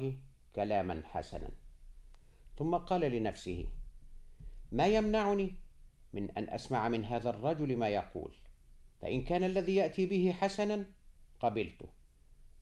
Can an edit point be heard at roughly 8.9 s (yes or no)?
yes